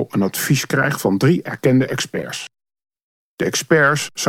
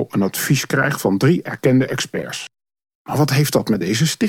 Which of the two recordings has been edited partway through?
second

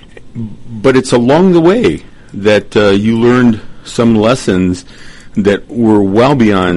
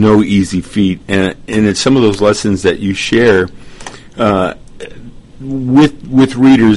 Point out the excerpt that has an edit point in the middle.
second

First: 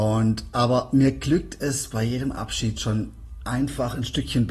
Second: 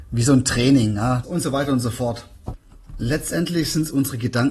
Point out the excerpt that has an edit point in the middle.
second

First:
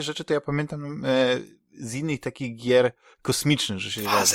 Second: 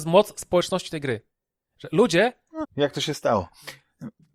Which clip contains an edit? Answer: second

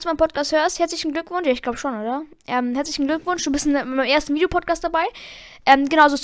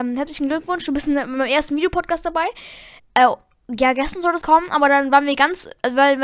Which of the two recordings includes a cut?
second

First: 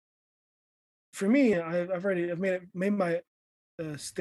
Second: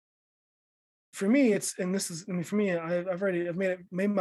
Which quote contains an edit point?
first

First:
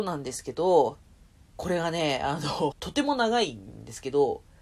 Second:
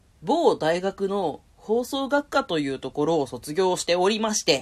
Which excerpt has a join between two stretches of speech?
first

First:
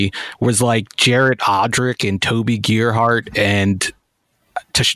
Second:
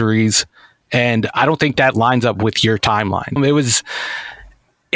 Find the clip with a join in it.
second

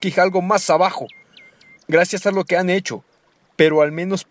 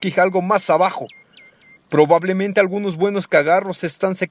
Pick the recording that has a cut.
first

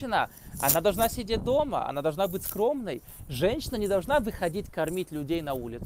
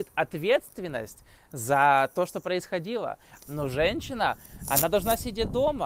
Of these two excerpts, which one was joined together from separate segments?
second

